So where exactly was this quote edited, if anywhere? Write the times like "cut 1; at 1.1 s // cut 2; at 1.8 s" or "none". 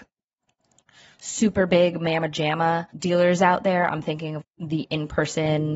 cut 1; at 2.9 s // cut 2; at 4.4 s